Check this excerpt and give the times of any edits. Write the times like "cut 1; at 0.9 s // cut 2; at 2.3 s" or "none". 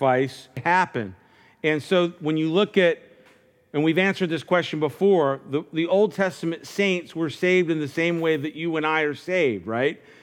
none